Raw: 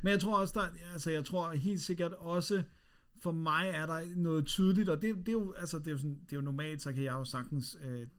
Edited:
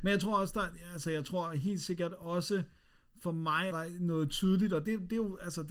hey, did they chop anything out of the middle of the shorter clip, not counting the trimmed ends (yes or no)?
yes